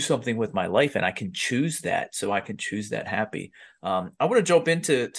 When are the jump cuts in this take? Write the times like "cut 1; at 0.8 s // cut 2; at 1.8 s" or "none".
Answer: none

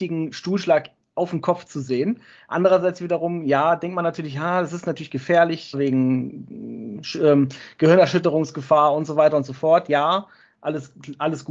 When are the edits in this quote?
cut 1; at 5.7 s

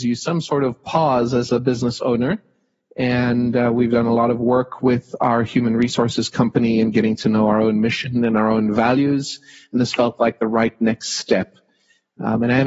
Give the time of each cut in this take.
none

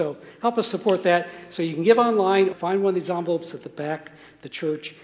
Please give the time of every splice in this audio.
cut 1; at 2.5 s

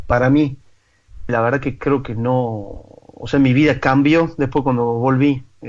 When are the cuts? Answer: cut 1; at 1.3 s

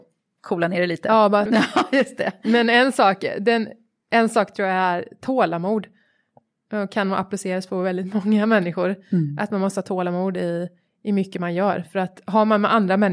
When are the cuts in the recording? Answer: cut 1; at 1.5 s

